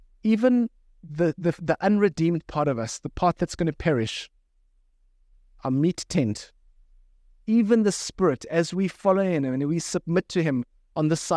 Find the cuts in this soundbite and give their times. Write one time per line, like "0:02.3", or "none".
none